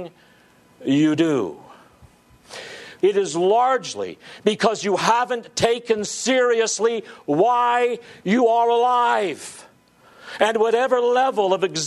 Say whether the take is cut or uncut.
cut